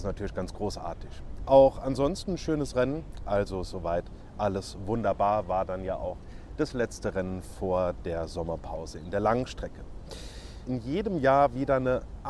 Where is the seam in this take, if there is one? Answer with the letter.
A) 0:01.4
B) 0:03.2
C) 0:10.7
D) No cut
C